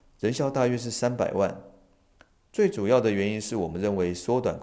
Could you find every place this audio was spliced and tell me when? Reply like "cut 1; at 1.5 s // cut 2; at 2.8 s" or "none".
none